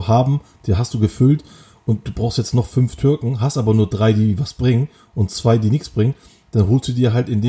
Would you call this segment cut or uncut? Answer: uncut